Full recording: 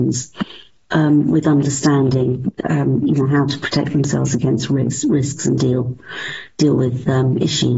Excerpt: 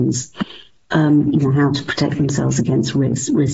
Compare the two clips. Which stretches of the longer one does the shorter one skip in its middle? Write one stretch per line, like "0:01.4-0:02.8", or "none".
0:01.3-0:03.0